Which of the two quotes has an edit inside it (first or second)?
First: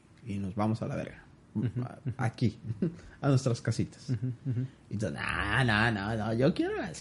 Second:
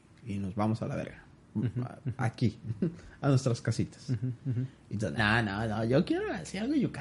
second